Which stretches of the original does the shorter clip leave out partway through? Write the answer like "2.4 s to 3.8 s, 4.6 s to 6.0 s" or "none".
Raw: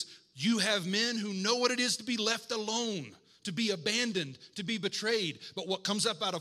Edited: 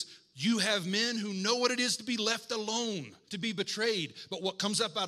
3.2 s to 4.5 s